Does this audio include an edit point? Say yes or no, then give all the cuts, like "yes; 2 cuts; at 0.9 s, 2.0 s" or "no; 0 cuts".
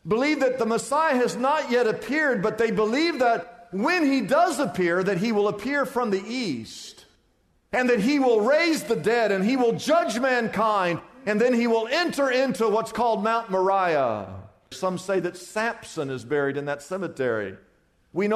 yes; 1 cut; at 14.7 s